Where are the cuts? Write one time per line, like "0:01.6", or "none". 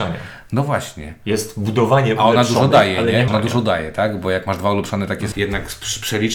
0:03.3
0:05.3